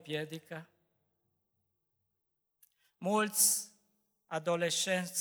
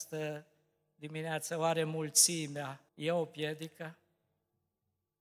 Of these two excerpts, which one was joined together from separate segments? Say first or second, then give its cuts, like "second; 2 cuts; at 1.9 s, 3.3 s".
second; 1 cut; at 2.9 s